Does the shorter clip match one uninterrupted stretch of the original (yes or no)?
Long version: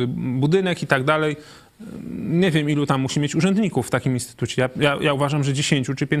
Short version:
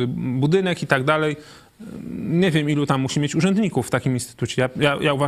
yes